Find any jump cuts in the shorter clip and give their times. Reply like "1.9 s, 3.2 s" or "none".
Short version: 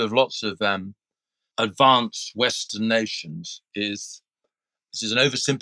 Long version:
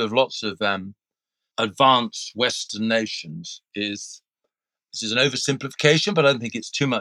none